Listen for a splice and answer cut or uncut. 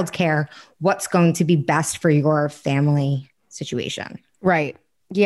uncut